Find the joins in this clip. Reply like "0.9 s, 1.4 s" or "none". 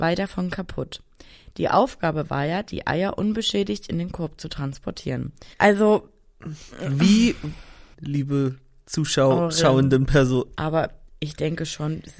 5.5 s, 7.9 s, 10.6 s

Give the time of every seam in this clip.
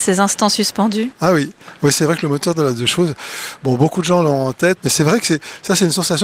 4.8 s

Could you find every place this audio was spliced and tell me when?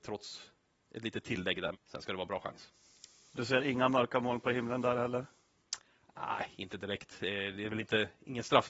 1.7 s

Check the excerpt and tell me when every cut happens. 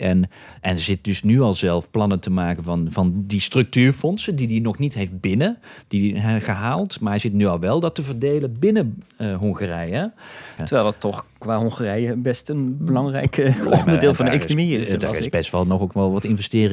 10.6 s

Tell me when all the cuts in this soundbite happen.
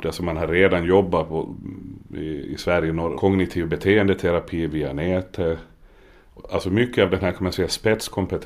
3.1 s

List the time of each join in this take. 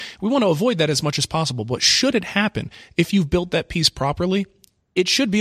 none

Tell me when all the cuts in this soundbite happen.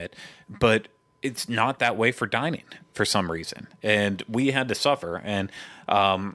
none

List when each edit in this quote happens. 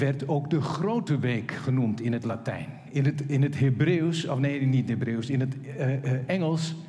none

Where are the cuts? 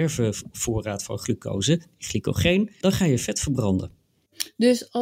2.8 s

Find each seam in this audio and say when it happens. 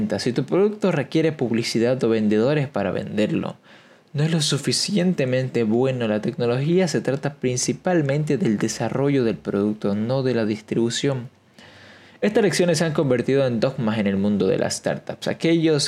none

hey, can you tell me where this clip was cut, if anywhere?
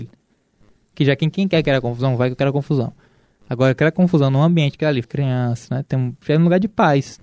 5.0 s, 6.2 s

